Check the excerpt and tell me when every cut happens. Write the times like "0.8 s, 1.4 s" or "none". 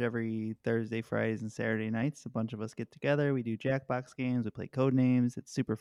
none